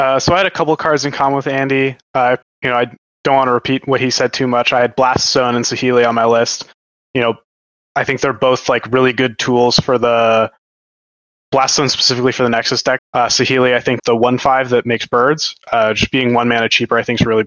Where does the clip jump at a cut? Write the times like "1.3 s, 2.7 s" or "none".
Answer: 2.4 s, 13.0 s, 14.0 s